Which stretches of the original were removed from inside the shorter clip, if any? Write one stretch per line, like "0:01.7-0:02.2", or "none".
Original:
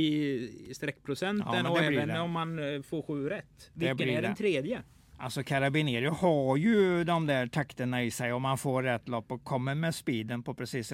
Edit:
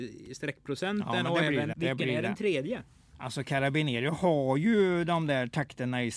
0:02.1-0:03.7